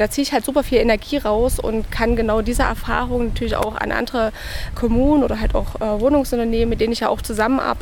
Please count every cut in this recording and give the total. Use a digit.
1